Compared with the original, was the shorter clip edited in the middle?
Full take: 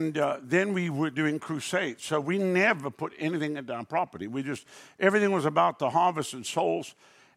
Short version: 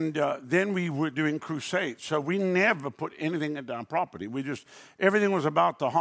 no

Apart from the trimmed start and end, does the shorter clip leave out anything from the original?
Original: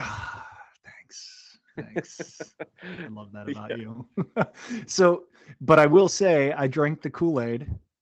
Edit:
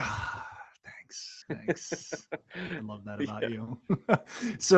yes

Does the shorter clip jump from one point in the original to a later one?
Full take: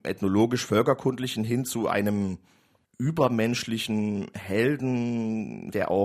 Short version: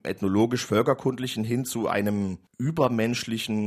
yes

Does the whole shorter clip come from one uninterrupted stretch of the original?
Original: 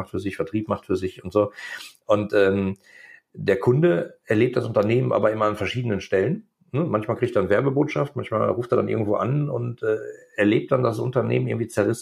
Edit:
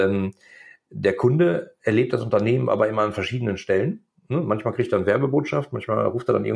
yes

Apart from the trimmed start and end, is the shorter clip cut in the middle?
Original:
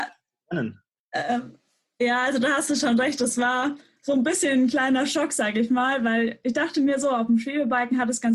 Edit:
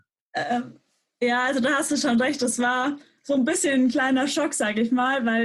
no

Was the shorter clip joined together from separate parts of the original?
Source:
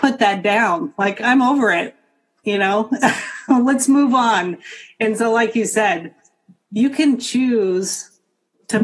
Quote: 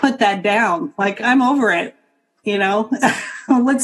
no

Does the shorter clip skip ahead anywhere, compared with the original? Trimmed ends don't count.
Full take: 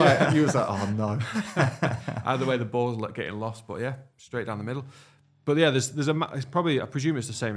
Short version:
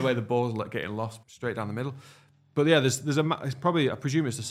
yes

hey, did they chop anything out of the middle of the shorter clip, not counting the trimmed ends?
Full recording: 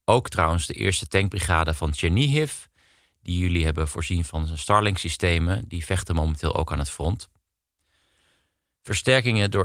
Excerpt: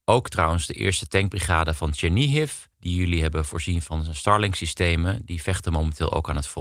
yes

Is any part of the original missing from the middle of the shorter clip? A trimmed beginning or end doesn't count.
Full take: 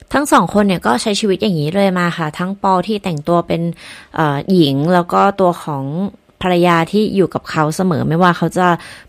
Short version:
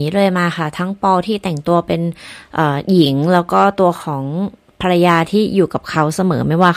no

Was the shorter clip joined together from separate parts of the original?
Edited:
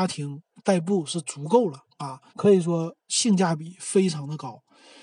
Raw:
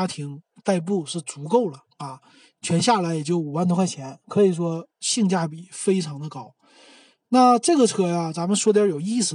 yes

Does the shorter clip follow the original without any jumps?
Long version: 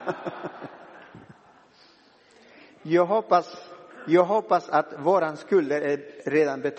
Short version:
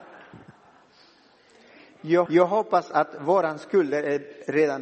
no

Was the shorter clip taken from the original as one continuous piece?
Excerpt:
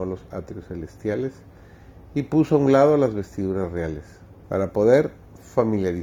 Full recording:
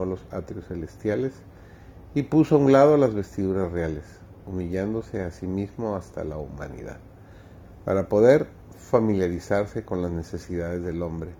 no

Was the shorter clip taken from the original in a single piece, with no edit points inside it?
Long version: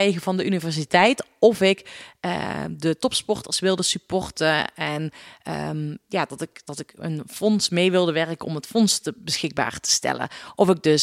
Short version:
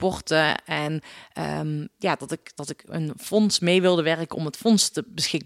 yes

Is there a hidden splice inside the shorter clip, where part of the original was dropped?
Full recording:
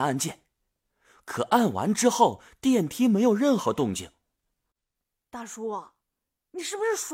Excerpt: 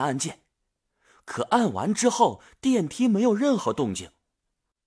no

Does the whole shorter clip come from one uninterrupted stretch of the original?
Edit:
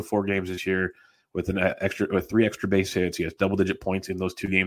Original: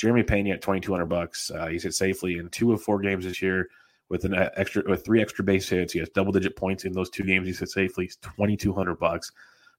yes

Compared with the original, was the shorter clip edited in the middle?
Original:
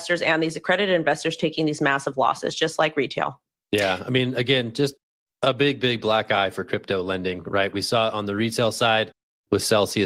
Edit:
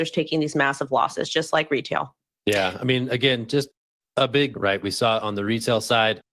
yes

